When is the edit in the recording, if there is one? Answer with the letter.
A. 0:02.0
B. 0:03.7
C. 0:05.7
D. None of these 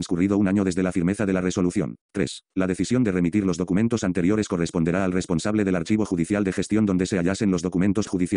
A